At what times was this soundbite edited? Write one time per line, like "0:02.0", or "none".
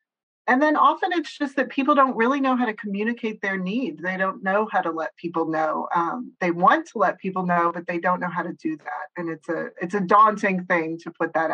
none